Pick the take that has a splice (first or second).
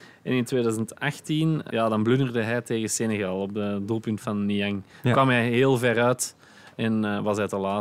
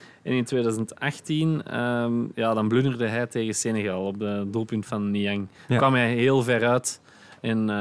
first